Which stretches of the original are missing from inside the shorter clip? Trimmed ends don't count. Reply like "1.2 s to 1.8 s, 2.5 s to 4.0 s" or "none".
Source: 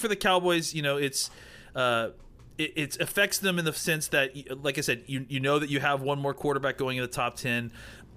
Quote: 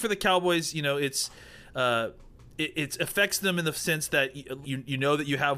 4.6 s to 5.0 s

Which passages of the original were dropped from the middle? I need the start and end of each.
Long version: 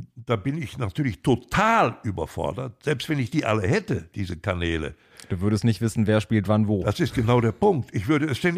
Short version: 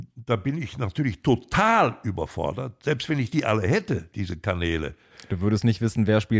none

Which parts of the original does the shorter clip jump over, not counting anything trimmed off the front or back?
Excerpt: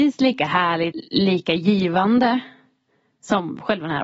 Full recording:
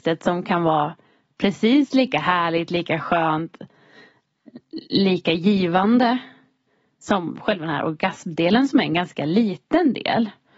2.7 s to 4.7 s

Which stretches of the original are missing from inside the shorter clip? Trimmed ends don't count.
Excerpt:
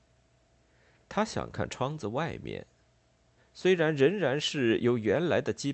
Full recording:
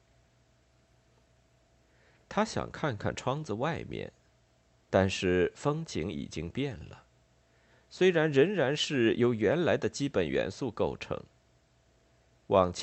2.7 s to 3.0 s, 4.8 s to 7.7 s

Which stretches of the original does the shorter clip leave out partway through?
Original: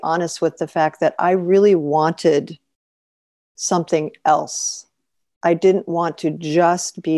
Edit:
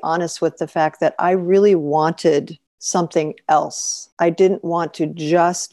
2.7 s to 3.4 s, 4.9 s to 5.4 s

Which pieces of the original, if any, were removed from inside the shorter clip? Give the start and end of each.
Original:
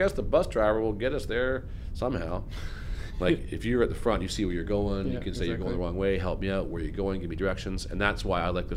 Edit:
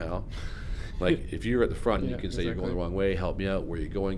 4.2 s to 5.0 s

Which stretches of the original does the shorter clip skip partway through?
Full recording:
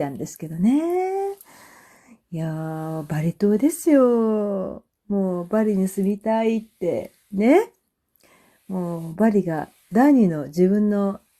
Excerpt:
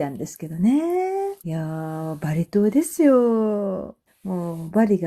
1.4 s to 2.3 s, 4.9 s to 8.5 s

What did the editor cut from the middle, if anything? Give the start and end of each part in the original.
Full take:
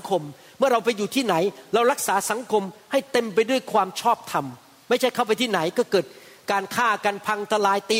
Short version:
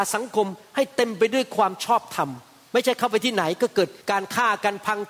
6.2 s to 6.4 s

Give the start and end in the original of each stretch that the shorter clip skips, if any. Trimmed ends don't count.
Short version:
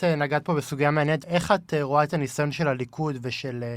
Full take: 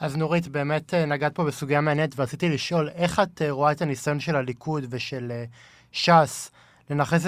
2.1 s to 2.9 s

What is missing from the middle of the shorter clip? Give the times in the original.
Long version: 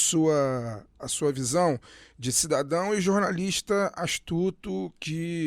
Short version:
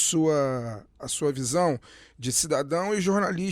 none

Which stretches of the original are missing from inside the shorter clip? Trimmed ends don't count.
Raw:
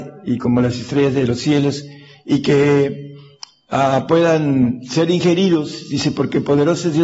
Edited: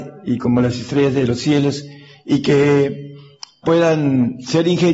3.6 s to 4.1 s

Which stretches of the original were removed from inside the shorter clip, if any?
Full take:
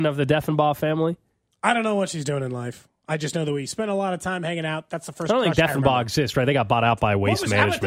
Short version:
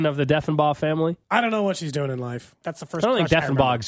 1.2 s to 1.6 s, 2.9 s to 4.9 s

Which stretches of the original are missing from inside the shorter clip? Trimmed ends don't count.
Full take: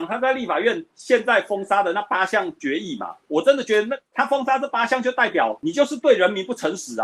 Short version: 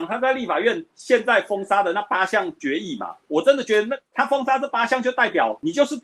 none

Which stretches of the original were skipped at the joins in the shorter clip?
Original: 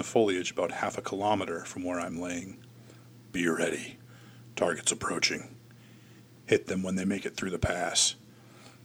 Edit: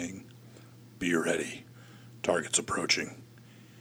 none

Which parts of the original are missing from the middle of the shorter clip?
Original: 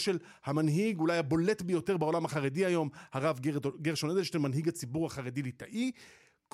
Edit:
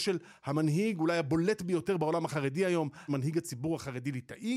3.1 s to 4.4 s

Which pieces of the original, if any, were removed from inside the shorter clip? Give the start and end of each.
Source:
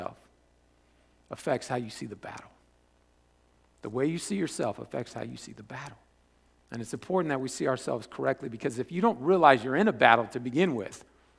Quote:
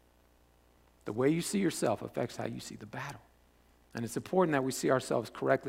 none

